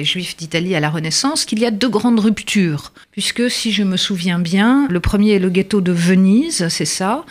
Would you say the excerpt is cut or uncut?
cut